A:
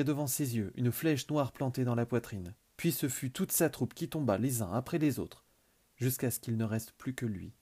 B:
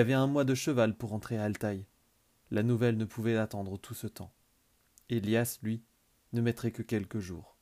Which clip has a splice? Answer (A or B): A